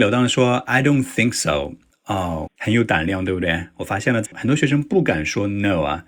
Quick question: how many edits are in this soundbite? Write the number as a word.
two